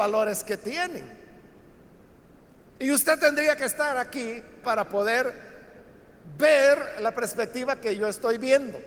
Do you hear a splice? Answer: yes; 2 cuts; at 2.7 s, 4.6 s

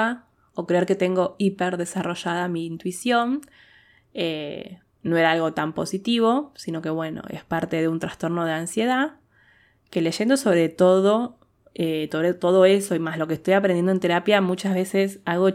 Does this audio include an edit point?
no; 0 cuts

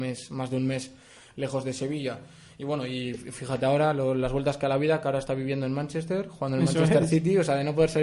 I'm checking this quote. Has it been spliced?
no; 0 cuts

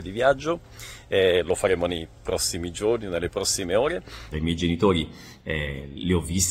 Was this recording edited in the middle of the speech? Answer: yes; 1 cut; at 4.3 s

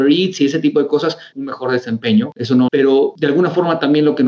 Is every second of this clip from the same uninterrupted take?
no; 2 cuts; at 1.3 s, 2.7 s

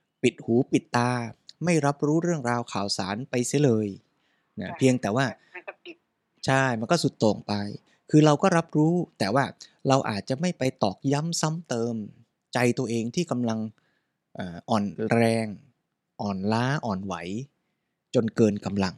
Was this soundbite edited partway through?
no; 0 cuts

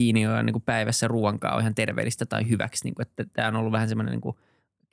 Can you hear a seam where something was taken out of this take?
no; 0 cuts

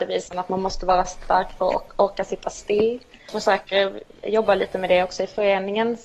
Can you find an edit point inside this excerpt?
no; 0 cuts

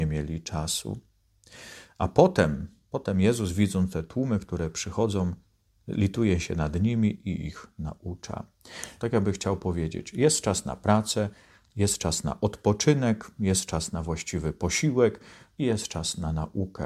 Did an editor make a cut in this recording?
yes; 1 cut; at 9.0 s

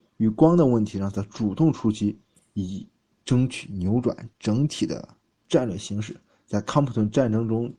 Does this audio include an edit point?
no; 0 cuts

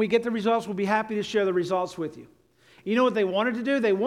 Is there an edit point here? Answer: no; 0 cuts

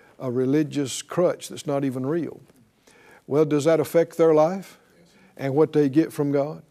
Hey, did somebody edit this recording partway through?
no; 0 cuts

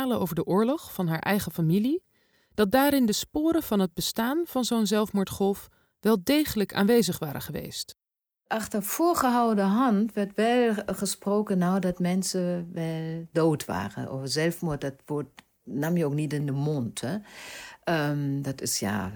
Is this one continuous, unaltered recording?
yes; 0 cuts

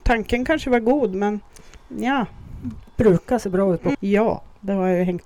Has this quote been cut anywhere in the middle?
yes; 1 cut; at 3.9 s

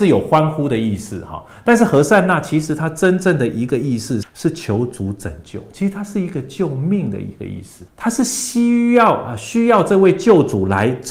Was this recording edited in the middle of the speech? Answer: yes; 2 cuts; at 4.2 s, 7.9 s

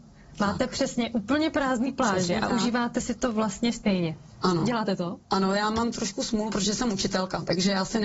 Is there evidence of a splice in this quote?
no; 0 cuts

